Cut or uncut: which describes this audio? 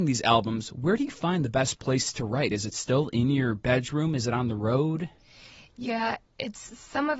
uncut